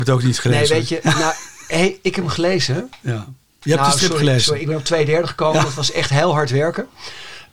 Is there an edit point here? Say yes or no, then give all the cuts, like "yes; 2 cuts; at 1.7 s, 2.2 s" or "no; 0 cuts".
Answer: no; 0 cuts